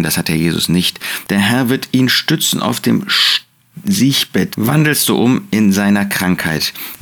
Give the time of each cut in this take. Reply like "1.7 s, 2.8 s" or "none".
1.2 s, 4.5 s